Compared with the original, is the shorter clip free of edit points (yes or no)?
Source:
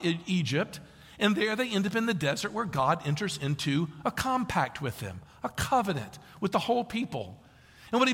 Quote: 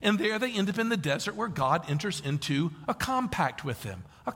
yes